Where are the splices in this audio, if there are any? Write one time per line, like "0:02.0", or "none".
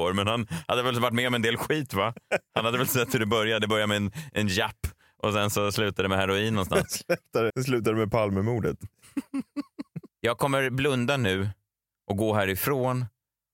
0:07.5
0:10.1